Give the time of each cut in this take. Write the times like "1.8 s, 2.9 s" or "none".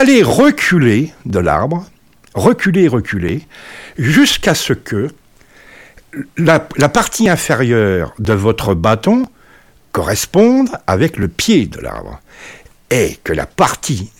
none